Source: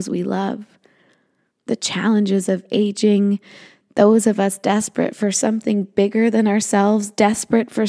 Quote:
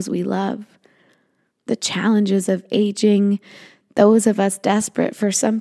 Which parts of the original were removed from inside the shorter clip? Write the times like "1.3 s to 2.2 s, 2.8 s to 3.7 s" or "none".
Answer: none